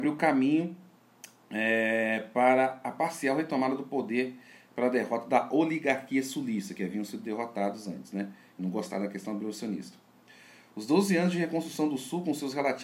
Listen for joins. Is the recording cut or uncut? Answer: uncut